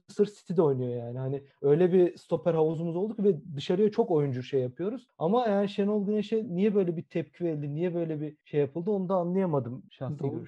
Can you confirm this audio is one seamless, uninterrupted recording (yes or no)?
yes